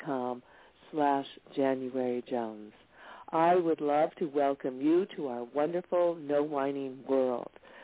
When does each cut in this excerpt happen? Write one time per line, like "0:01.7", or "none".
0:03.2